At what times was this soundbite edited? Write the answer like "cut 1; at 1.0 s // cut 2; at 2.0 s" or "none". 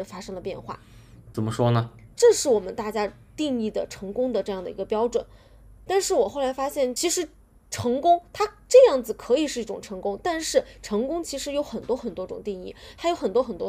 cut 1; at 2.1 s